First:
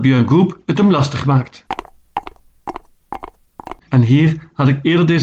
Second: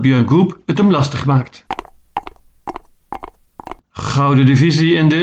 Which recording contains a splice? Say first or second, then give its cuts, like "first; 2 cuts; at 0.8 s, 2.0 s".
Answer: first; 1 cut; at 3.8 s